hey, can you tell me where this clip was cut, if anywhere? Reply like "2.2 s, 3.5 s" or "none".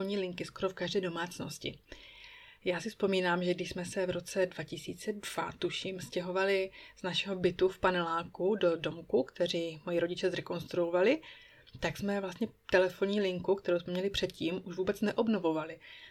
none